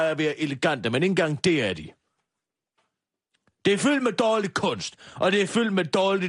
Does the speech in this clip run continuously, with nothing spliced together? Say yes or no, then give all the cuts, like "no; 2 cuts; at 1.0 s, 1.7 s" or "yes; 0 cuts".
yes; 0 cuts